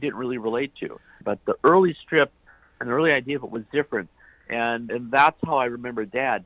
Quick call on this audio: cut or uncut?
cut